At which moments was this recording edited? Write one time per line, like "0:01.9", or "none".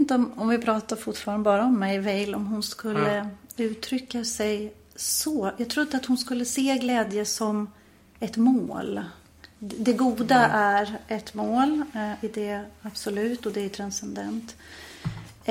none